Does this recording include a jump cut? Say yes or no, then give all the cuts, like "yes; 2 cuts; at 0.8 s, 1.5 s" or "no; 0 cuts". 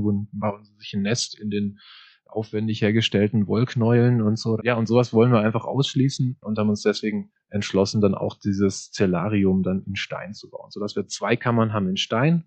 yes; 1 cut; at 4.6 s